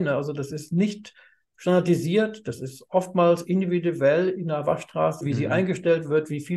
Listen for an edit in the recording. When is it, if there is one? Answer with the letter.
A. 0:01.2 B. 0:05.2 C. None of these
B